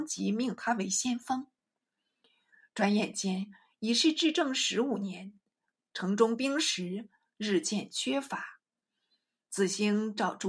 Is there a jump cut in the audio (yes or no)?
no